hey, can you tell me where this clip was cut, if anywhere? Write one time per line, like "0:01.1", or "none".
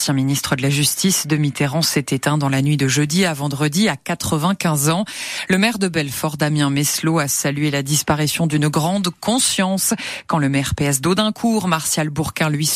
none